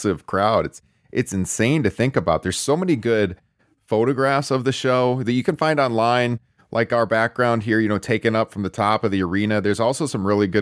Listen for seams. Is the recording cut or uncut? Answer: uncut